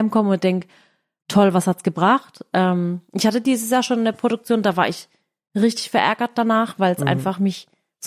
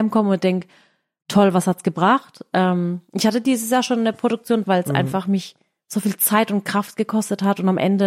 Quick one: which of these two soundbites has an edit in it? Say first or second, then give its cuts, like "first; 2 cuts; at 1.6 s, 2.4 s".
second; 1 cut; at 4.6 s